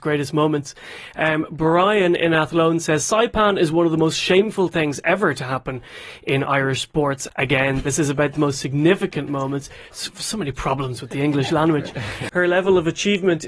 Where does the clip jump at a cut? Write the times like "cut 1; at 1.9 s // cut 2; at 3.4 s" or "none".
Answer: cut 1; at 7.3 s // cut 2; at 12.3 s